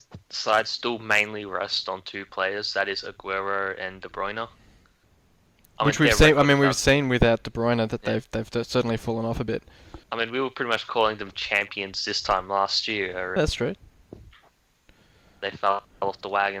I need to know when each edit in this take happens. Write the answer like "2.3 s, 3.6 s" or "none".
10.0 s, 13.4 s